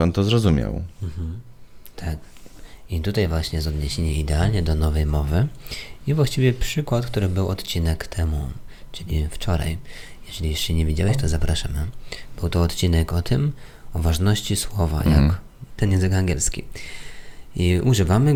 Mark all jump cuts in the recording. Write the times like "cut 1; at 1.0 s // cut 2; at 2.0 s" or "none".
cut 1; at 15.7 s